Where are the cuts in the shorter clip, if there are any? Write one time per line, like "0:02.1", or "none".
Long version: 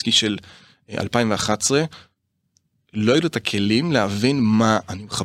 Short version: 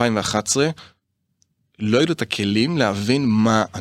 none